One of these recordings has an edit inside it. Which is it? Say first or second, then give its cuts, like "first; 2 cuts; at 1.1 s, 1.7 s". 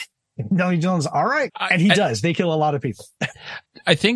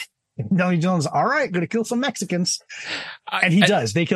first; 1 cut; at 1.5 s